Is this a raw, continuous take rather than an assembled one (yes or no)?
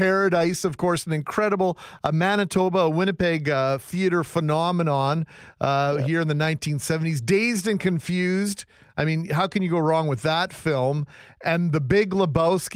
yes